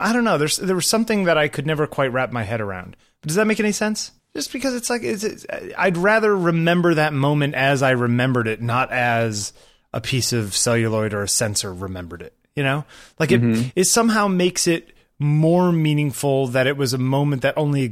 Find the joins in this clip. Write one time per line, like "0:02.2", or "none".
0:04.2